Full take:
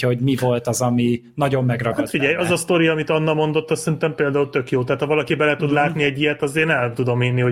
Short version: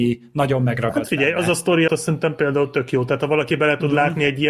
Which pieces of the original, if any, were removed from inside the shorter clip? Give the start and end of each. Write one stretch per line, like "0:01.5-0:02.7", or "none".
0:02.9-0:03.7